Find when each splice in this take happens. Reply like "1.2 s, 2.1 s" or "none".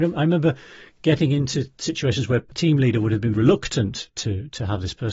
3.3 s